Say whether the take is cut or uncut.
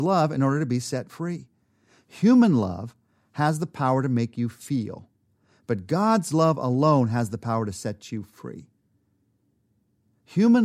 uncut